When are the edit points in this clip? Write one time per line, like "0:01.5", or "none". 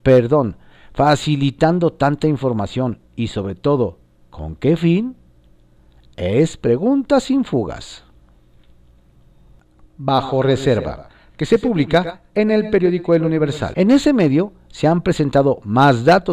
0:13.7